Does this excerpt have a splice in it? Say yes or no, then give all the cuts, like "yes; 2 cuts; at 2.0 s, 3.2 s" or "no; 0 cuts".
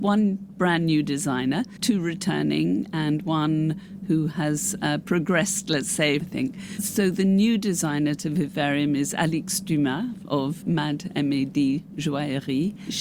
yes; 2 cuts; at 6.2 s, 10.6 s